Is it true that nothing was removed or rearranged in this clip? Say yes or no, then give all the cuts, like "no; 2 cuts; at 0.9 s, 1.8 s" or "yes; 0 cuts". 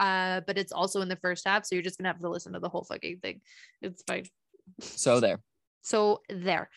yes; 0 cuts